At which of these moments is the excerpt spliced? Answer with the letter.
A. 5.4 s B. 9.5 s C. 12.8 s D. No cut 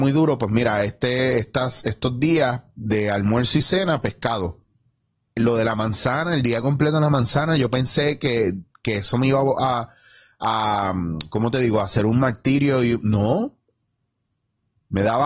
A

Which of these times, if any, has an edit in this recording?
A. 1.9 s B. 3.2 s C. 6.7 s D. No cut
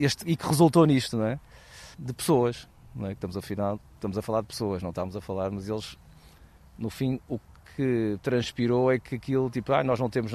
A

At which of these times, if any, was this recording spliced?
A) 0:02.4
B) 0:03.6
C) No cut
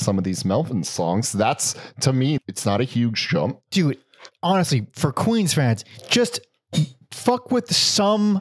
A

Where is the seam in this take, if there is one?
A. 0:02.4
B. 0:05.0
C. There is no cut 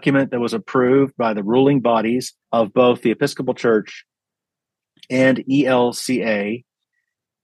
A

